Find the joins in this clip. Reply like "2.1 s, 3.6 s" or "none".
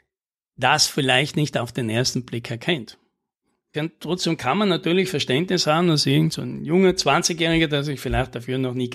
3.7 s